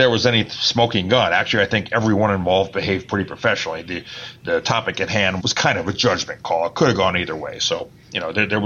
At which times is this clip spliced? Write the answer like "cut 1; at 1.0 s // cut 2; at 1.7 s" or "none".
cut 1; at 5.4 s

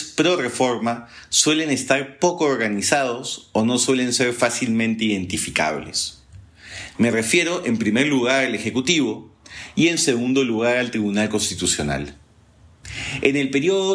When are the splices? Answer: cut 1; at 6.9 s

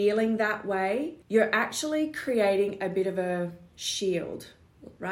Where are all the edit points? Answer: cut 1; at 1.2 s

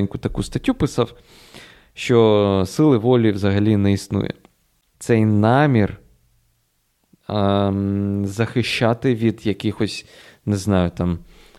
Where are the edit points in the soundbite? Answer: cut 1; at 4.9 s

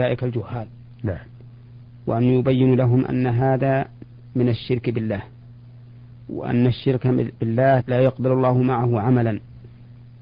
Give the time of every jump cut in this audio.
cut 1; at 7.8 s

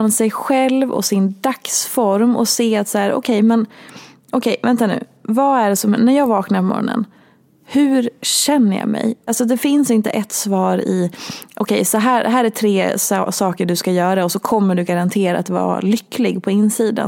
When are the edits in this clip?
cut 1; at 9.3 s

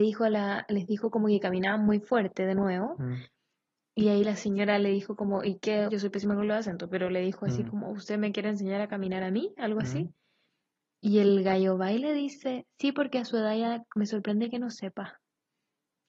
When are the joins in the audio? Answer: cut 1; at 5.9 s

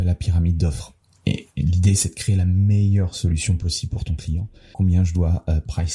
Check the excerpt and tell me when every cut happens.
cut 1; at 4.7 s

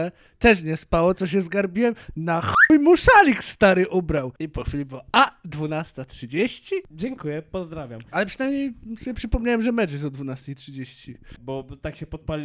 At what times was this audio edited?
cut 1; at 11.4 s

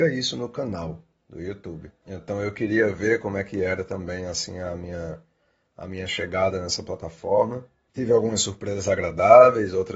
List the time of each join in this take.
cut 1; at 2.0 s // cut 2; at 7.9 s

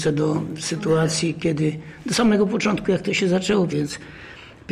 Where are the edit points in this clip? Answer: cut 1; at 3.7 s

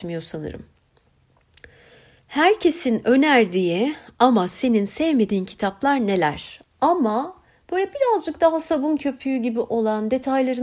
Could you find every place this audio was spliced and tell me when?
cut 1; at 6.6 s

